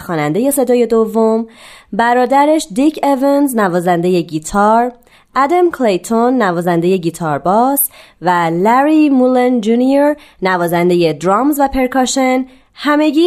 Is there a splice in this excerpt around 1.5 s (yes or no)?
no